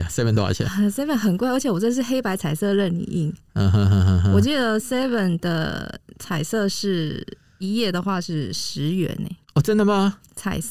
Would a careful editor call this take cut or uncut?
cut